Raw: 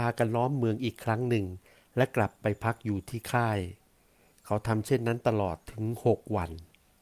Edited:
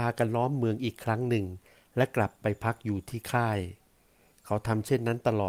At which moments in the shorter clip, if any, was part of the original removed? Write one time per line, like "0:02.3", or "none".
none